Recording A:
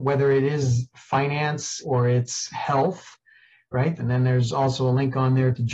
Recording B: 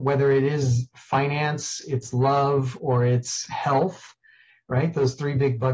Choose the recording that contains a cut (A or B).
A